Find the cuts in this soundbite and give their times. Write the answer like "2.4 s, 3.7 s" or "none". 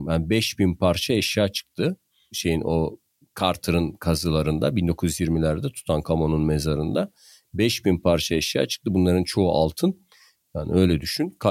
10.4 s